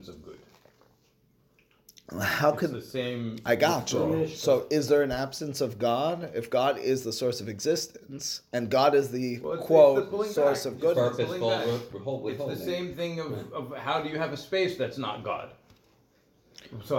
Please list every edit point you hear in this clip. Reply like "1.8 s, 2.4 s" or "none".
none

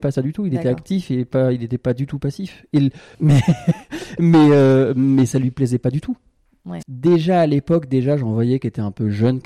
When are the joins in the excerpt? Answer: 3.1 s, 6.8 s

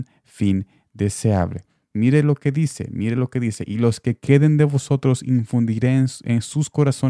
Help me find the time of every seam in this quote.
none

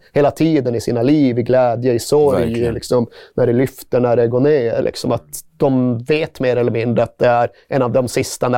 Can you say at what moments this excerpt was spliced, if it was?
4.8 s

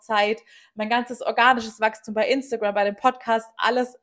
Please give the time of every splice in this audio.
none

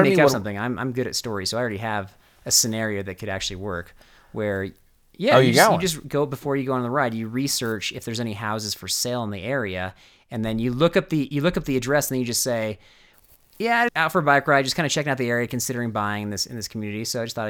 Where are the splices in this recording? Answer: 13.9 s

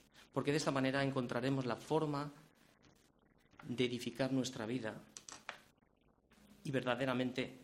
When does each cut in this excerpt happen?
none

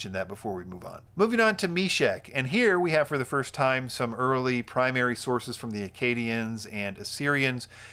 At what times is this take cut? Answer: 1.1 s

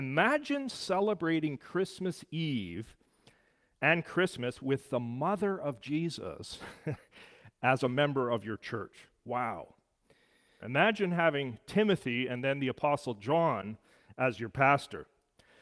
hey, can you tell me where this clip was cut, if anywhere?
10.6 s

